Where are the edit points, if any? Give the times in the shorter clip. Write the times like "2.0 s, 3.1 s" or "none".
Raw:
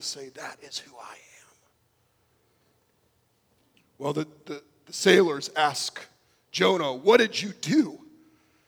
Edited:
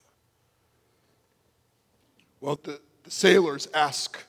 2.6 s